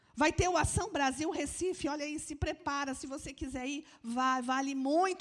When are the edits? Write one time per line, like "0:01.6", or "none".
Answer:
none

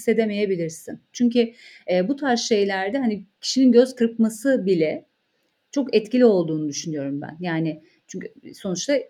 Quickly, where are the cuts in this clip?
0:01.1

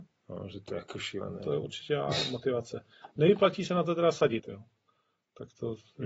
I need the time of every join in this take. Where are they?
0:04.4

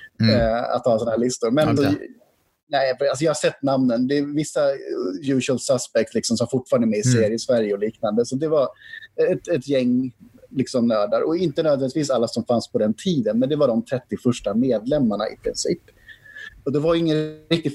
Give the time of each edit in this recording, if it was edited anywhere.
0:01.8

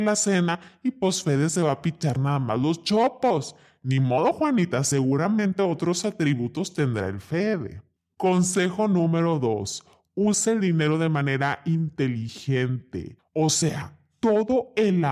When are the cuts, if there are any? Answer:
none

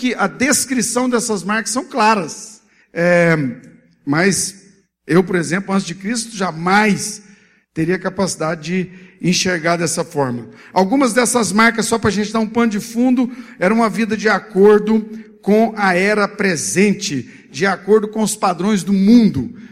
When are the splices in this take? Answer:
0:02.8

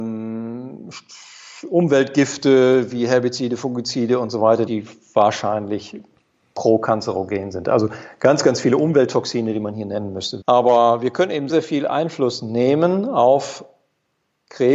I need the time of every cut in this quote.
0:04.7
0:10.4
0:11.5

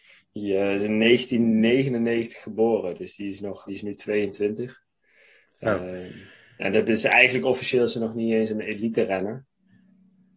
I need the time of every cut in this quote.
0:03.7

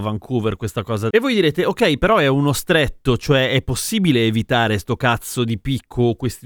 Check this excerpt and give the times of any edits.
none

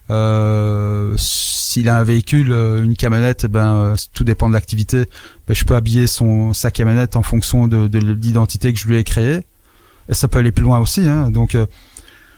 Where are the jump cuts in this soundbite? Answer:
none

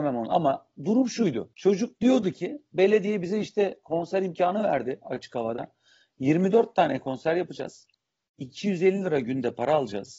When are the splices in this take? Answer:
none

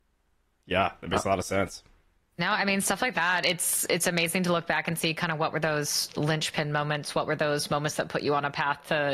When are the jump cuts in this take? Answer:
0:02.2

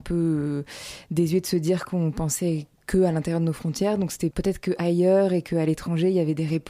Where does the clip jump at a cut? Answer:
0:04.3

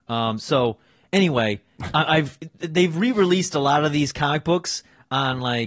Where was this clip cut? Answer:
none

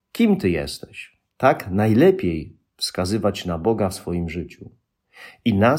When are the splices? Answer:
0:01.3

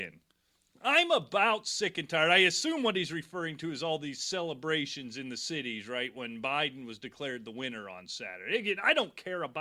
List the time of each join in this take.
none

